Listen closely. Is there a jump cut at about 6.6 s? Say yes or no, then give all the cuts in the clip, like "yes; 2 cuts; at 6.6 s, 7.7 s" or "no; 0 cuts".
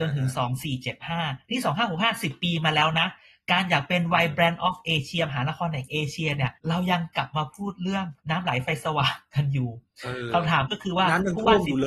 yes; 2 cuts; at 6.6 s, 8.2 s